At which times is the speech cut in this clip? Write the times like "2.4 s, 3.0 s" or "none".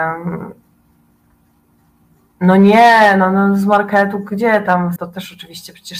5.0 s